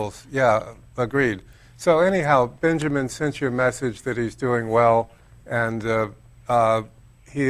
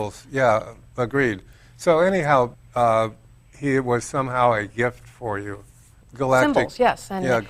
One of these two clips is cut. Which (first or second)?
second